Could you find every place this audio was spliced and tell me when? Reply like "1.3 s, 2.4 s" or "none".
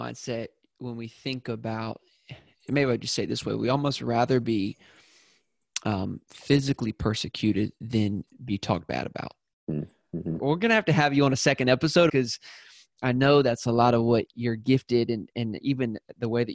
10.4 s, 12.1 s